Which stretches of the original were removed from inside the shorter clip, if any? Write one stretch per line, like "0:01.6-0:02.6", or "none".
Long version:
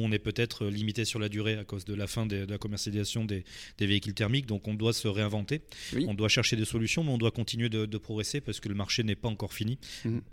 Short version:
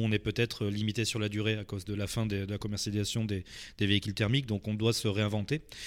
none